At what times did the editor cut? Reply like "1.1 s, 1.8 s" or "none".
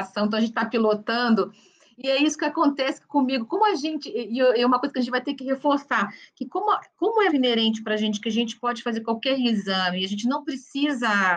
7.3 s